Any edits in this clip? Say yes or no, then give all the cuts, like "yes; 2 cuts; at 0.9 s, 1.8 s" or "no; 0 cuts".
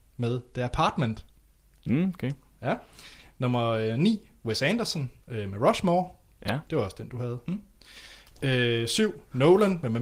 yes; 2 cuts; at 5.2 s, 6.7 s